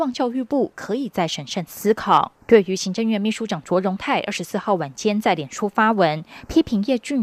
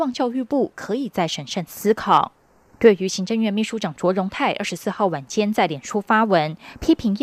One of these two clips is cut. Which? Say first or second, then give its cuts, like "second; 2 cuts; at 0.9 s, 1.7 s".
first; 1 cut; at 2.4 s